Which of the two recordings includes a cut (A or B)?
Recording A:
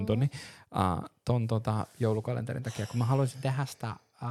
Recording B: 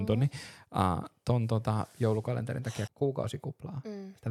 B